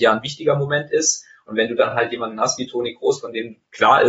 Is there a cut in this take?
no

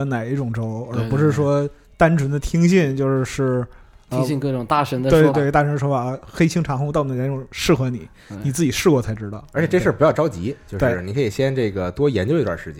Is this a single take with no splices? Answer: no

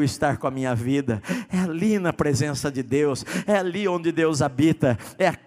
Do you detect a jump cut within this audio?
no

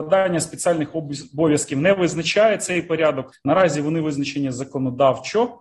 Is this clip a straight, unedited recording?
no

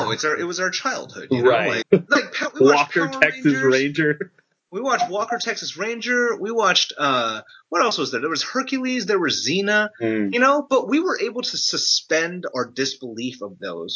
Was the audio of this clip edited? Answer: yes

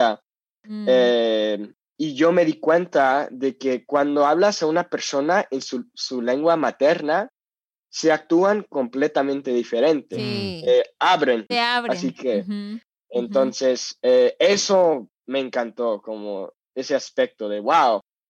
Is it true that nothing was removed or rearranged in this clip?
no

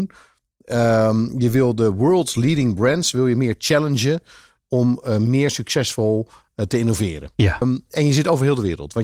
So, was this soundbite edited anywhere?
yes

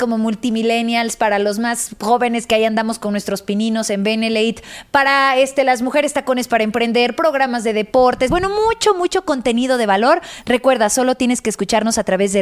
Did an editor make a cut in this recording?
no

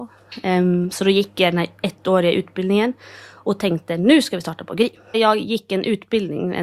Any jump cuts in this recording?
yes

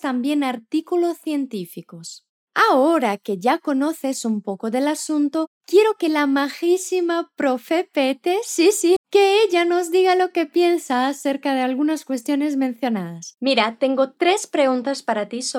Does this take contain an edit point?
yes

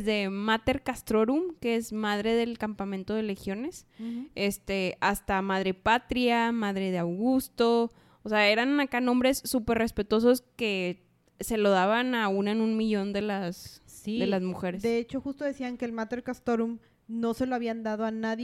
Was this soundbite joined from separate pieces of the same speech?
no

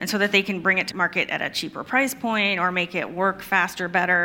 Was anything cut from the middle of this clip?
yes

